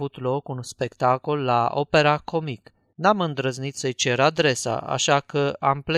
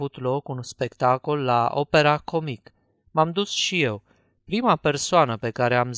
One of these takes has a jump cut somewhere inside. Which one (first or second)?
first